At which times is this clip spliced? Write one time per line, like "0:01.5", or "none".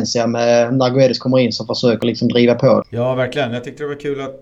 0:02.8